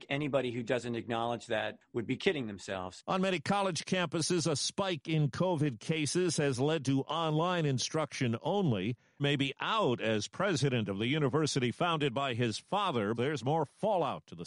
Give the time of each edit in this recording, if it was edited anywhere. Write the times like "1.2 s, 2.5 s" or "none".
9.2 s, 13.1 s